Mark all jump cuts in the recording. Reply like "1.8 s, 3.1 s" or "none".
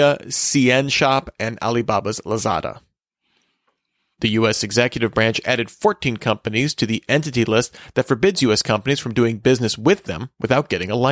none